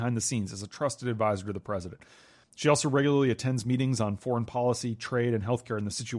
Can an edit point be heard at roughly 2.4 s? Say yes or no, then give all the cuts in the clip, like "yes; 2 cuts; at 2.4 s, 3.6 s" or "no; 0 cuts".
yes; 1 cut; at 2.4 s